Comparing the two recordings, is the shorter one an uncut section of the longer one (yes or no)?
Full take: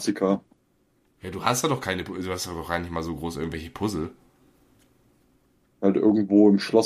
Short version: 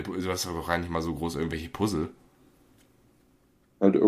yes